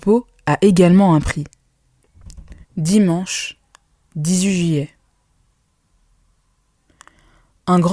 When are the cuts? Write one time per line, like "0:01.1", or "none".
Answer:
0:02.6

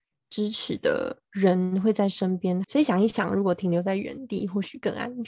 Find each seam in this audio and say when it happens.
0:02.6

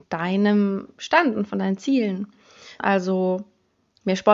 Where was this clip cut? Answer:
0:02.8

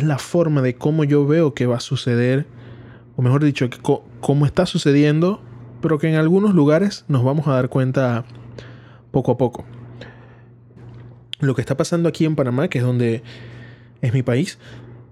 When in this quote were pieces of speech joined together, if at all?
0:10.8

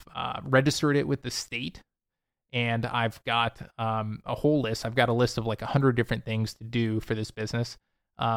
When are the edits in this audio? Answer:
none

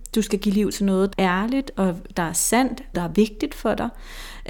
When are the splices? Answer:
0:01.1
0:02.9

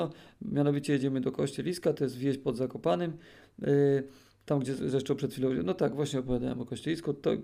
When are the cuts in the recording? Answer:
none

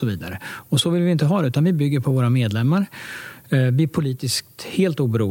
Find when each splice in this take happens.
none

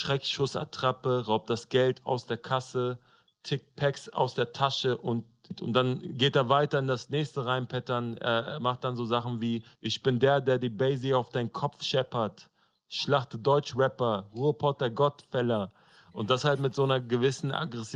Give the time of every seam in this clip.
none

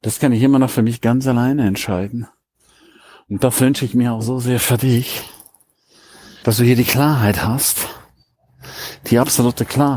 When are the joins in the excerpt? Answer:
none

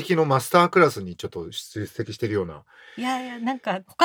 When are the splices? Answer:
none

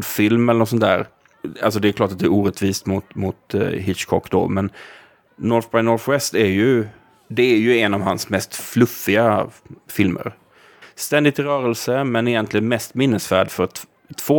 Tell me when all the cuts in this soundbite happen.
0:10.8

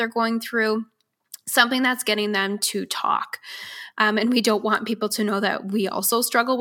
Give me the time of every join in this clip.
0:03.9

